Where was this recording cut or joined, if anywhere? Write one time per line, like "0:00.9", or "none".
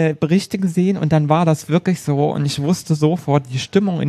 none